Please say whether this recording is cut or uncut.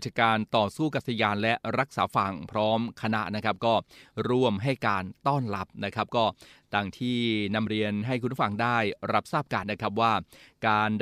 cut